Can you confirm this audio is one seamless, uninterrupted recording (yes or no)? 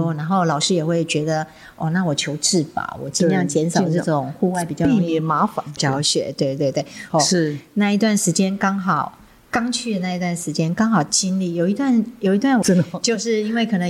no